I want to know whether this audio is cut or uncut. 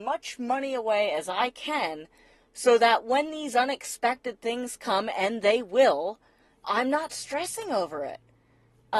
cut